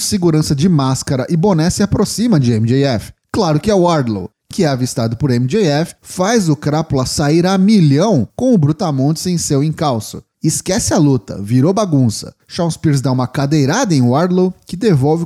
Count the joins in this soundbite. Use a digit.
1